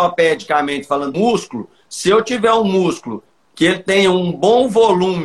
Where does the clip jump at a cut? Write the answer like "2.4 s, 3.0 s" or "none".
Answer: 1.1 s